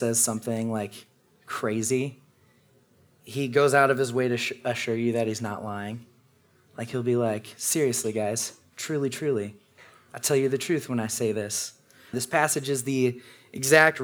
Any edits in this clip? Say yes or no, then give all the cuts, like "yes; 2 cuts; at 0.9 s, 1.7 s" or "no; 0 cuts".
yes; 1 cut; at 12.1 s